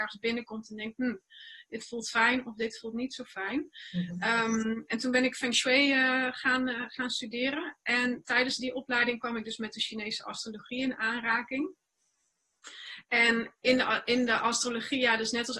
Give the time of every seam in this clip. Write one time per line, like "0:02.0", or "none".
none